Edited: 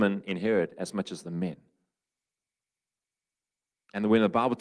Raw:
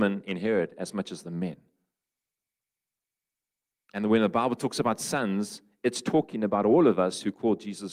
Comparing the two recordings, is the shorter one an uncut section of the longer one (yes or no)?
yes